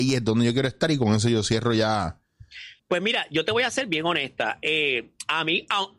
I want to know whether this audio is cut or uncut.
cut